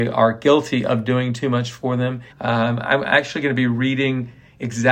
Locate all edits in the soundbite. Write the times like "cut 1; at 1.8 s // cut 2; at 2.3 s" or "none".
cut 1; at 2.3 s

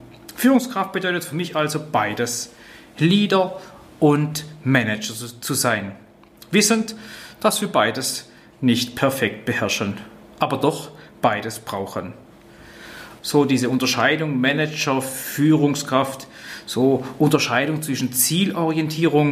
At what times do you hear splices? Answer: cut 1; at 13.2 s

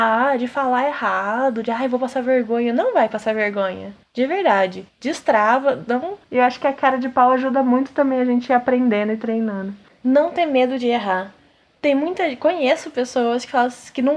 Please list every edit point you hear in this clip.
cut 1; at 6.3 s // cut 2; at 9.9 s

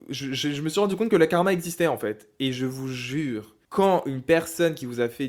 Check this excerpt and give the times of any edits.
cut 1; at 3.6 s

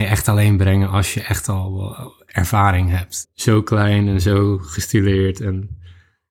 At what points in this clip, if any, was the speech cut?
cut 1; at 3.2 s

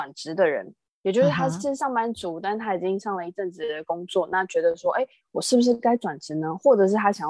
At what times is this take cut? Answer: none

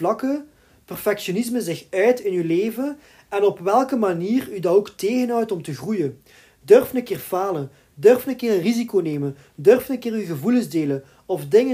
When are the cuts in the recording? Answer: none

